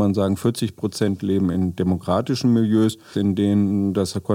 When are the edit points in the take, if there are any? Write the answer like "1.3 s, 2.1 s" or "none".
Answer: 3.1 s